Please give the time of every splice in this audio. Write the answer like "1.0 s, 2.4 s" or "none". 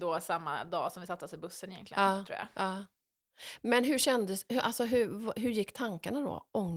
none